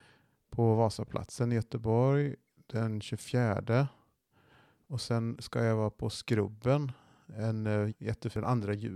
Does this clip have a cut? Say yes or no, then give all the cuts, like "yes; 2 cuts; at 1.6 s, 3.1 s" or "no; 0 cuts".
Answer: yes; 1 cut; at 7.9 s